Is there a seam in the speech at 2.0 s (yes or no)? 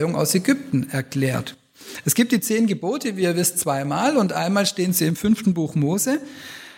no